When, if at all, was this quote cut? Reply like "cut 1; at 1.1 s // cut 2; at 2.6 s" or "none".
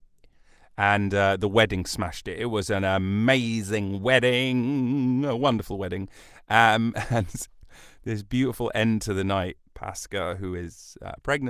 cut 1; at 9.6 s